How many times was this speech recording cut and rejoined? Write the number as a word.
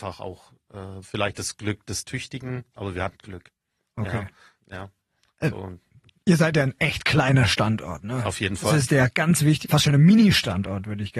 two